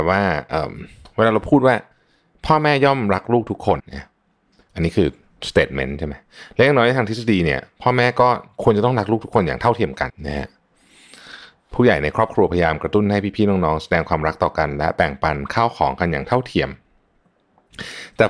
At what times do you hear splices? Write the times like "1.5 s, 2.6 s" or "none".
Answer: 3.8 s, 10.1 s